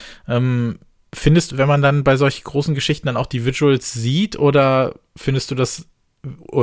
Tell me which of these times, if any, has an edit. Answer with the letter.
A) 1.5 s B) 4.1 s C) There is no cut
A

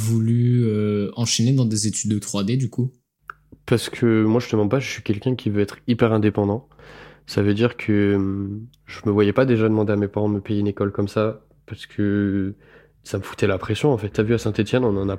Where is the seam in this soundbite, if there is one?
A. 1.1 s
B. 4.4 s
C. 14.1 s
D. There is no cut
C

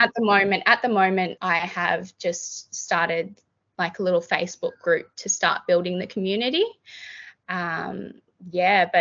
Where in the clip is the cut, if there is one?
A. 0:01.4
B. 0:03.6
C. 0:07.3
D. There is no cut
A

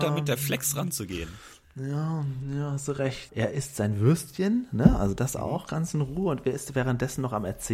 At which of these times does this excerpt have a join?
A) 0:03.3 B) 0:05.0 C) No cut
A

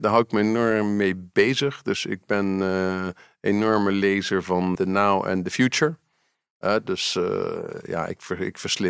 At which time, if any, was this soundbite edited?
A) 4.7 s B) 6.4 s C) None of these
A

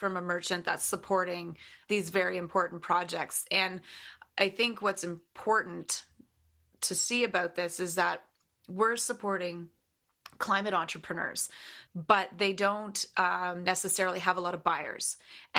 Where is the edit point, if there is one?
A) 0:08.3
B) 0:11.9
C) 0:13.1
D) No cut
B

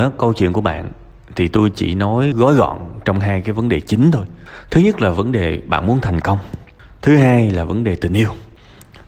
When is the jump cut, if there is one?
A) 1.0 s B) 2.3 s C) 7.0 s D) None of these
B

